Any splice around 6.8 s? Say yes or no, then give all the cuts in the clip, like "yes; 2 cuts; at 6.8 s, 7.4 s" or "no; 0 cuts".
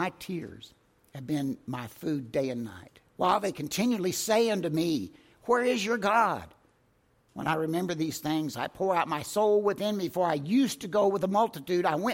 no; 1 cut; at 3.1 s